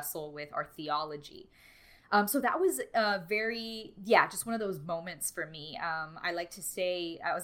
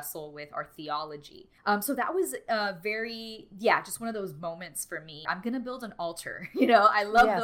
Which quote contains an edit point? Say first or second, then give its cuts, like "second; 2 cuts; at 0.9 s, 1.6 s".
second; 2 cuts; at 1.6 s, 5.3 s